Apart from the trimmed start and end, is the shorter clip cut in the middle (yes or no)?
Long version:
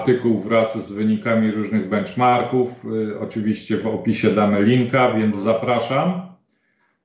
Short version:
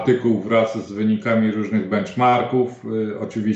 no